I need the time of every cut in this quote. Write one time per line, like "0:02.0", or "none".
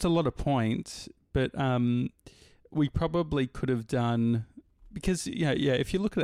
none